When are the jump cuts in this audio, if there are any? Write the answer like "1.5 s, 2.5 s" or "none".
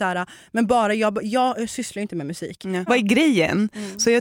2.9 s